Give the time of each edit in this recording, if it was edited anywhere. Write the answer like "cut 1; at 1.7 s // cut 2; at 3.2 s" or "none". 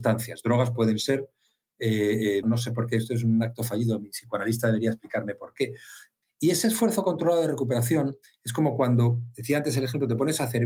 cut 1; at 2.4 s // cut 2; at 6.2 s